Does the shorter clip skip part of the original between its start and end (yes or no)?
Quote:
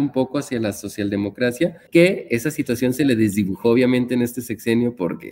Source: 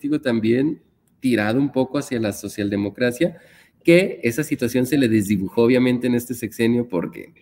yes